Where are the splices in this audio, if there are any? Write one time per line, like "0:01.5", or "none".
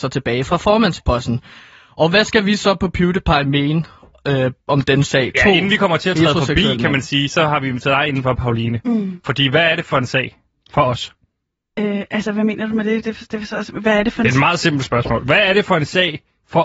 none